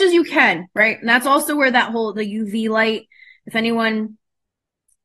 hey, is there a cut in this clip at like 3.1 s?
no; 0 cuts

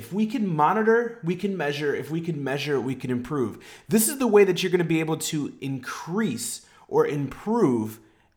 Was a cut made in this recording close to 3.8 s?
no; 0 cuts

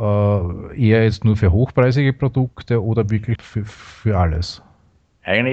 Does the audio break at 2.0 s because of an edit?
no; 1 cut; at 3.4 s

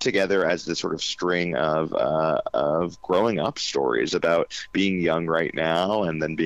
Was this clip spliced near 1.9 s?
no; 0 cuts

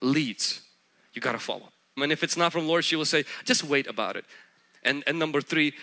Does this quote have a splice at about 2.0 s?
yes; 1 cut; at 2.0 s

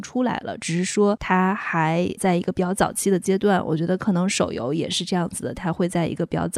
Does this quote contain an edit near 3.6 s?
no; 0 cuts

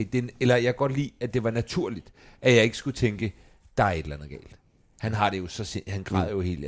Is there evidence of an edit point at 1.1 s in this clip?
no; 0 cuts

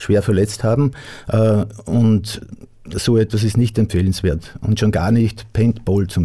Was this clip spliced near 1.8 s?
no; 0 cuts

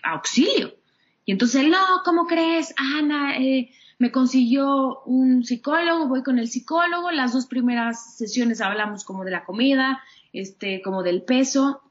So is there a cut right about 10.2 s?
no; 0 cuts

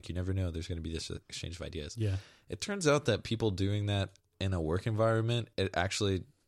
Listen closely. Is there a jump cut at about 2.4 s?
no; 0 cuts

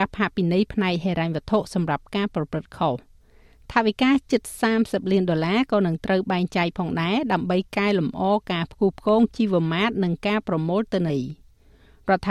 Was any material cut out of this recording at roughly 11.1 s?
yes; 1 cut; at 11.1 s

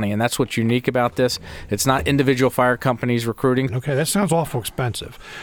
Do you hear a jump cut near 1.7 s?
no; 1 cut; at 3.7 s

